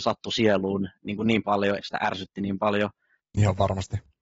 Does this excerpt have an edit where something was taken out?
yes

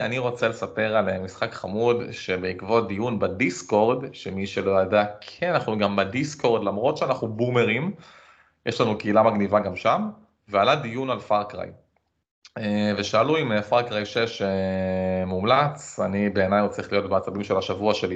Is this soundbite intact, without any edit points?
yes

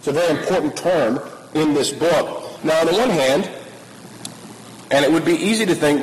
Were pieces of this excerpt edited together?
yes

